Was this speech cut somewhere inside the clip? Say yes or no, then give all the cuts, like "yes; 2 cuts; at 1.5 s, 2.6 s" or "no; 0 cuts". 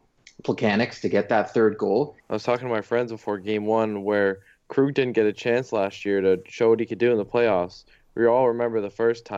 yes; 1 cut; at 2.2 s